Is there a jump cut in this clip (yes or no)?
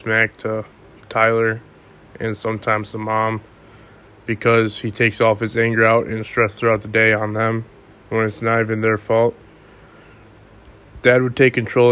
no